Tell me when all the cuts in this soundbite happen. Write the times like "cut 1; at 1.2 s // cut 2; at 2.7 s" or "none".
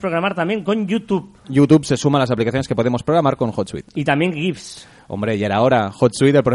cut 1; at 1.4 s

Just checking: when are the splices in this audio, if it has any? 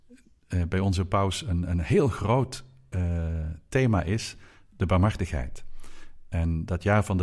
none

